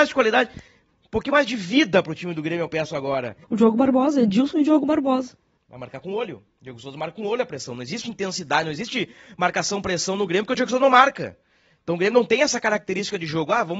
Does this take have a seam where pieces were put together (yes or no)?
yes